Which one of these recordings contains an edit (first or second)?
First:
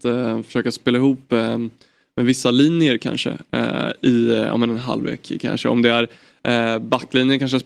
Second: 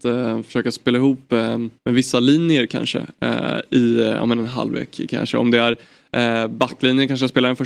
second